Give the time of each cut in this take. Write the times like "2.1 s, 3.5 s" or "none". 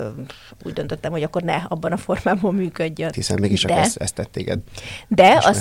3.1 s